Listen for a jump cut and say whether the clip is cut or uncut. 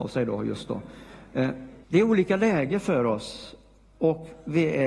cut